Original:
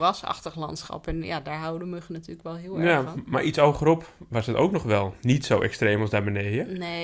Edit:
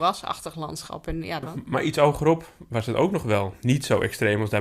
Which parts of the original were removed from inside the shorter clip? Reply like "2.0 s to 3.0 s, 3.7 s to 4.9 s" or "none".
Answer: 1.4 s to 3.0 s